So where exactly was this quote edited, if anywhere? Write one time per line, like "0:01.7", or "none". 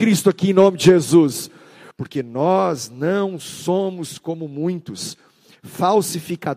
0:01.9